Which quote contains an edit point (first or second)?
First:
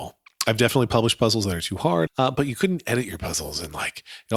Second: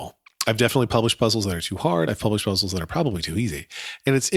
first